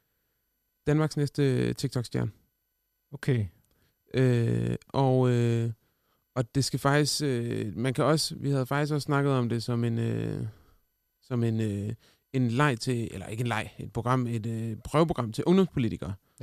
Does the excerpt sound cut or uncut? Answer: uncut